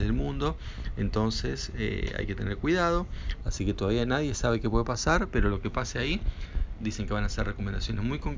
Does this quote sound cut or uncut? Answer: cut